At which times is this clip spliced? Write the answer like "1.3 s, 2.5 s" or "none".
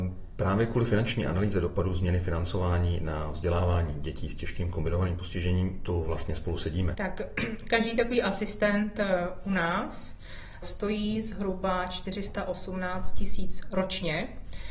6.9 s, 10.6 s